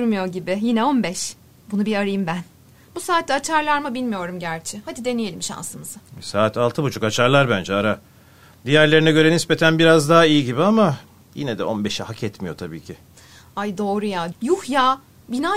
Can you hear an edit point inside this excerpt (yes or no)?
yes